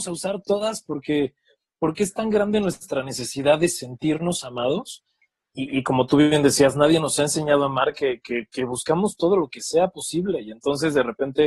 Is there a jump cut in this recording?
no; 0 cuts

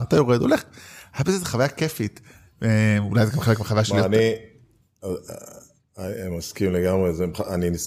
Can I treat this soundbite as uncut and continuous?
yes; 0 cuts

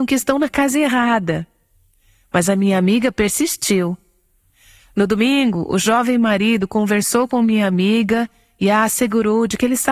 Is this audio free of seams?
yes; 0 cuts

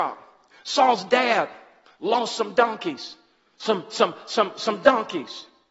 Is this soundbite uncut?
yes; 0 cuts

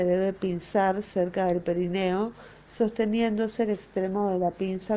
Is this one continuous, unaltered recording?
yes; 0 cuts

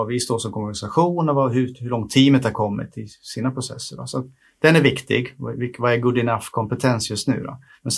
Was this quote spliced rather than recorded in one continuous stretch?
no; 0 cuts

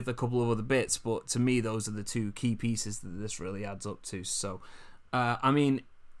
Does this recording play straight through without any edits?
yes; 0 cuts

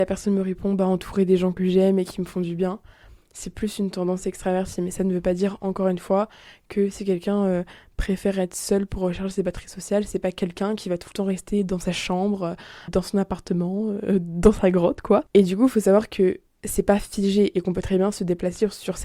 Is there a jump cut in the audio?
yes; 1 cut; at 12.9 s

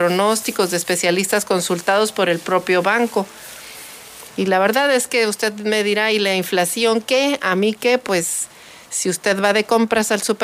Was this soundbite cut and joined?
yes; 1 cut; at 4.3 s

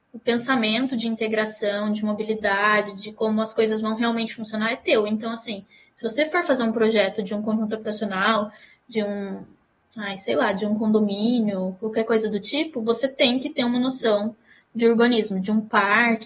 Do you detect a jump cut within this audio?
no; 0 cuts

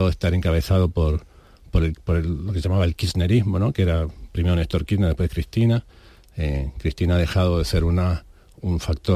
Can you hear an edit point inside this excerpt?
no; 0 cuts

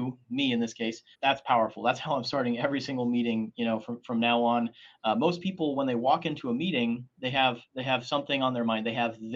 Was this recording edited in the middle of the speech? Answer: yes; 1 cut; at 1.1 s

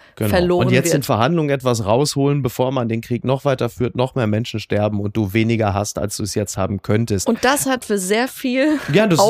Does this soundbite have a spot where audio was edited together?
no; 0 cuts

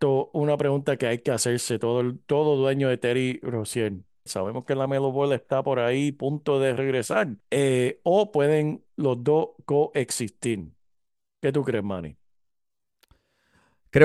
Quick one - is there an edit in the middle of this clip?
yes; 2 cuts; at 4.3 s, 7.4 s

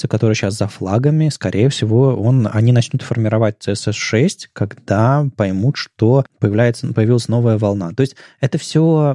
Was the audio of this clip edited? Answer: no; 0 cuts

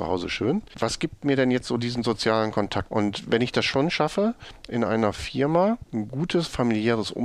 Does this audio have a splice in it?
yes; 1 cut; at 2.9 s

